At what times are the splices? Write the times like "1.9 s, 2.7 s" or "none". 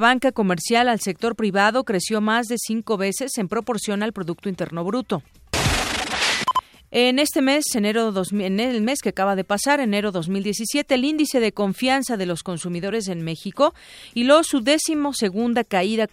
none